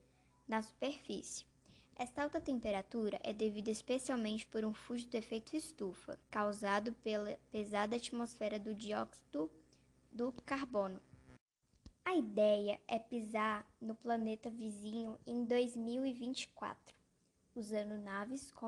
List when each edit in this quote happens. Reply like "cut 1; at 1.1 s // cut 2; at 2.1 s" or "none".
cut 1; at 6.2 s // cut 2; at 12.0 s